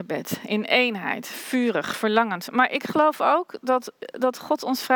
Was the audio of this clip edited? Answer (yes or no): no